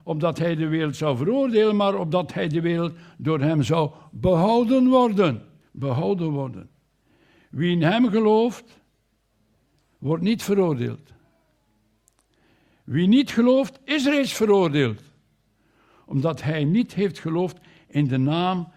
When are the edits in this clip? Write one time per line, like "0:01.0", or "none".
0:05.6